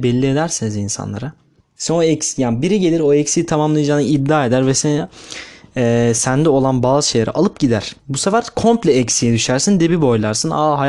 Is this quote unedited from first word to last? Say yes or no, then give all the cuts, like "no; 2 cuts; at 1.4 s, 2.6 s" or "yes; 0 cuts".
no; 2 cuts; at 1.6 s, 8.0 s